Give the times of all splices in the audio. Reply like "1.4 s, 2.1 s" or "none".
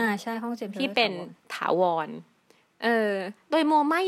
none